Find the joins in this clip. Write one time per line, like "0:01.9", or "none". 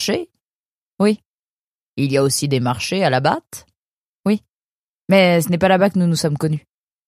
none